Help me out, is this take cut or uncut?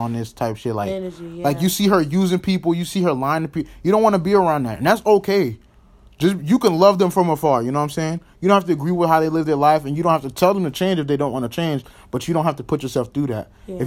uncut